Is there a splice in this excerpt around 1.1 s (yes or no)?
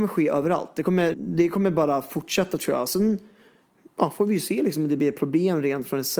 yes